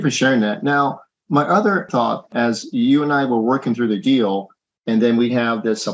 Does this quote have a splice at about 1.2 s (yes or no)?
no